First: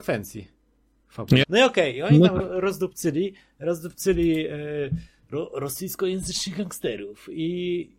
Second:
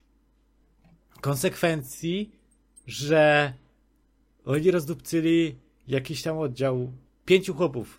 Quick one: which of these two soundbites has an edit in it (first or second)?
first